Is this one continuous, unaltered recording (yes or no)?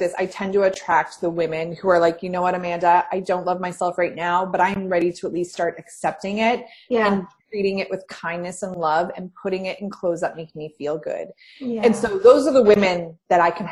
yes